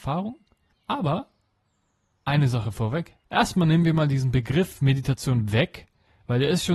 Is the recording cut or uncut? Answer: cut